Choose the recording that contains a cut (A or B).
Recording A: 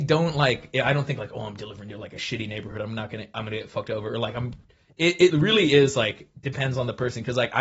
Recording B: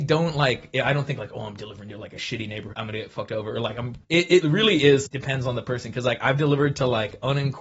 B